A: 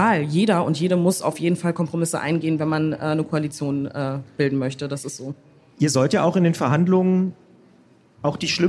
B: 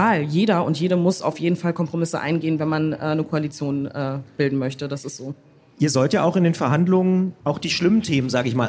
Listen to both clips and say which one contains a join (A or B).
B